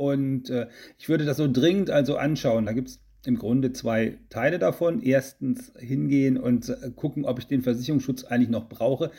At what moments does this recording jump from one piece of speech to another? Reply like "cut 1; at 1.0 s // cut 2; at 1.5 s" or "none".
none

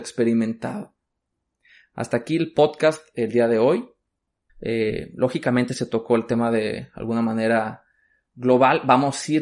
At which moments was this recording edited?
cut 1; at 4.5 s

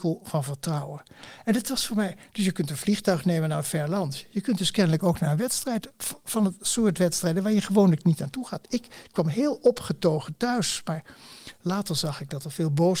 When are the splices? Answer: none

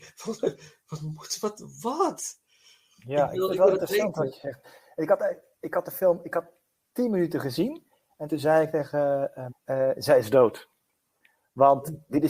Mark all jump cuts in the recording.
cut 1; at 9.5 s

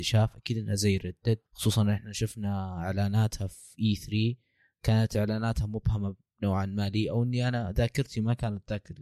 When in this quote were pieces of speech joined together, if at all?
cut 1; at 1.5 s

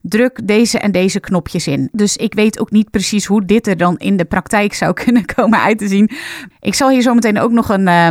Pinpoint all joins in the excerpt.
cut 1; at 1.9 s // cut 2; at 6.5 s

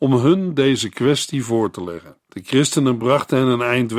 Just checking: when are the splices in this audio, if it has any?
cut 1; at 2.2 s

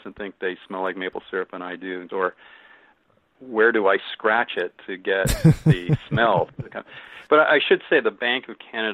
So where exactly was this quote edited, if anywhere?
cut 1; at 2.1 s

